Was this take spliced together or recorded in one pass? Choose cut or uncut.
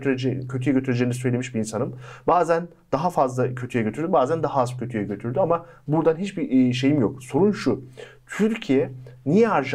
uncut